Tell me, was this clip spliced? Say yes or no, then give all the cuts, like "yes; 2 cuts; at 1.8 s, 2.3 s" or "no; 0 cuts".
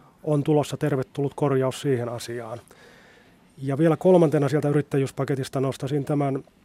no; 0 cuts